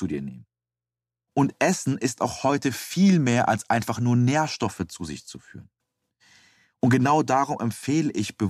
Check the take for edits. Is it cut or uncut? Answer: uncut